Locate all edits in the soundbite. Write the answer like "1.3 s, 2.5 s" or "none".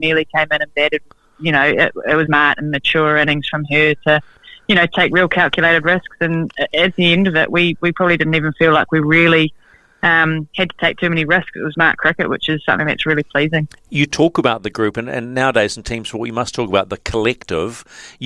2.3 s, 11.7 s